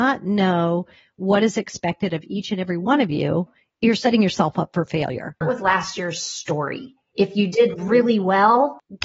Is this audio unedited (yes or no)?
no